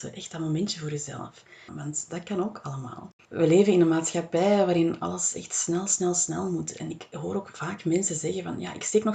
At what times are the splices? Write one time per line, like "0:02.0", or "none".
0:01.7
0:03.2